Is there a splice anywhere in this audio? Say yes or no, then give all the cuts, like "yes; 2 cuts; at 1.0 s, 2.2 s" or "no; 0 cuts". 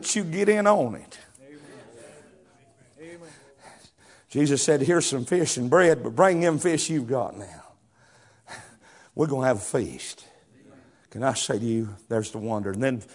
no; 0 cuts